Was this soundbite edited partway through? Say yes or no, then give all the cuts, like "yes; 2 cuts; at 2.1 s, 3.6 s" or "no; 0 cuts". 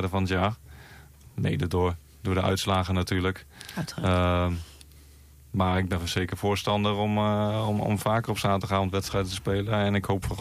no; 0 cuts